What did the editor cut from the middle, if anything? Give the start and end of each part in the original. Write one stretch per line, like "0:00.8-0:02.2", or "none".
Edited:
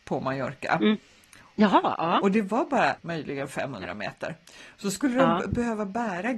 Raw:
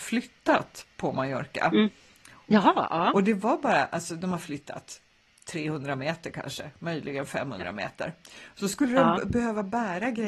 0:03.9-0:06.7